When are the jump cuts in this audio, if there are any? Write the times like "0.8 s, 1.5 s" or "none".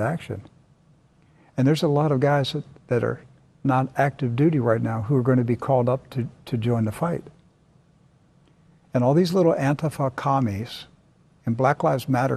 none